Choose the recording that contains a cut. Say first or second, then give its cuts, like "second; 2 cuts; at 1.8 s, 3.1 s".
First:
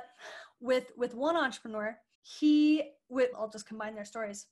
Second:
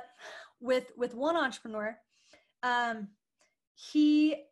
first; 2 cuts; at 2.1 s, 3.3 s